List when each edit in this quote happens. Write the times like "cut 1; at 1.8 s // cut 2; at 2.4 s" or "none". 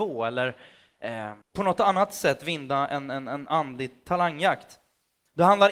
cut 1; at 1.4 s